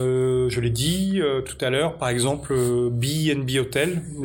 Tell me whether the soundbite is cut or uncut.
uncut